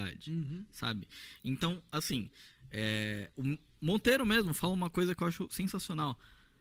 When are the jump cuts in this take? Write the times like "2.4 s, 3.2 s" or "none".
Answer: none